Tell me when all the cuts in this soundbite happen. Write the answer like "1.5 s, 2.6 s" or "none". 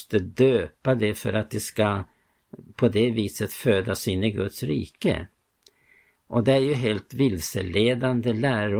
none